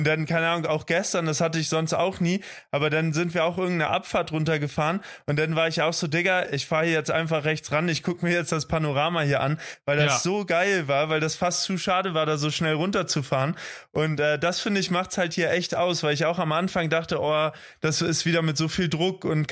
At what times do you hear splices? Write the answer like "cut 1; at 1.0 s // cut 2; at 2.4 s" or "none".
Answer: none